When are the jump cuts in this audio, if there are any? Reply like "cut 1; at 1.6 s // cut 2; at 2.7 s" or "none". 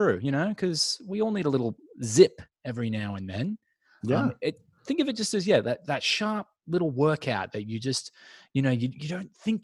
none

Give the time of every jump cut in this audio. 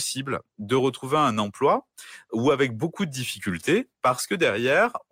none

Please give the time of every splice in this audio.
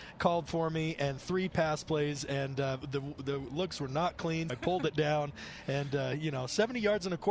cut 1; at 4.5 s

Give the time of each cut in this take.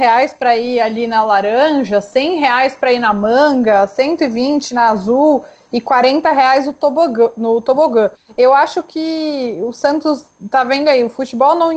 none

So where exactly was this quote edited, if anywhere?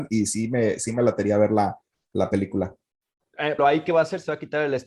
cut 1; at 3.6 s

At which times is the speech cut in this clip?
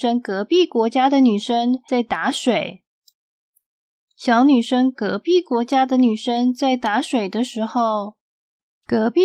none

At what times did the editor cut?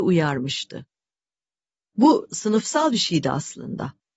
none

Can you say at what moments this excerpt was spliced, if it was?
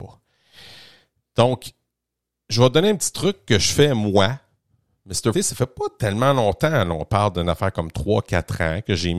cut 1; at 5.3 s

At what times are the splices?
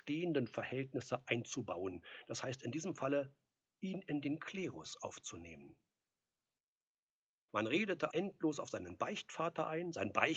cut 1; at 8.1 s

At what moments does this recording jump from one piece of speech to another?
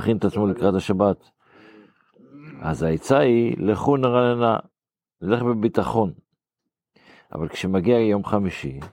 none

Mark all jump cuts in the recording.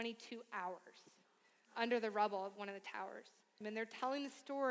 cut 1; at 3.6 s

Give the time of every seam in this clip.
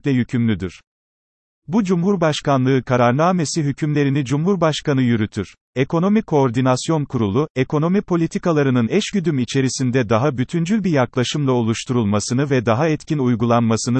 cut 1; at 5.6 s

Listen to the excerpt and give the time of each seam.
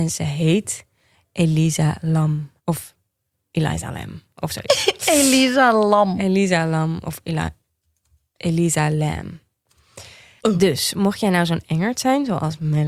cut 1; at 2.6 s // cut 2; at 10.4 s

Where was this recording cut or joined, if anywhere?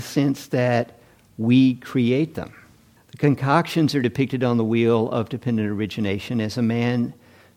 cut 1; at 3.0 s

